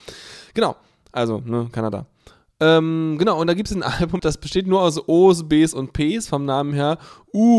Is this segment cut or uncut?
cut